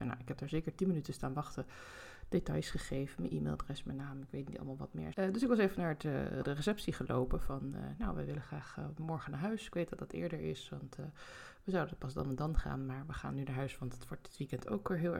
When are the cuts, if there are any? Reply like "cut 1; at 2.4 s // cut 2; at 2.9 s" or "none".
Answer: cut 1; at 5.1 s